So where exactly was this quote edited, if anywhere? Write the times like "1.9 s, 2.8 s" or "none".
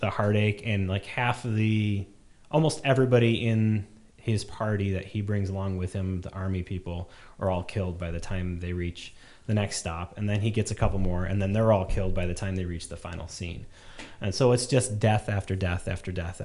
none